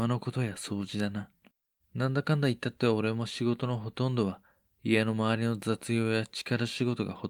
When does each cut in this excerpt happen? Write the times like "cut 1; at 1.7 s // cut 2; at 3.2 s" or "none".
cut 1; at 1.8 s